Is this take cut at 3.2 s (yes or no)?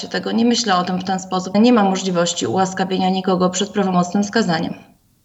no